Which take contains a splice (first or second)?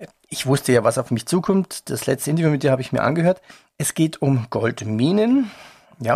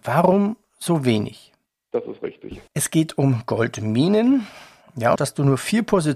second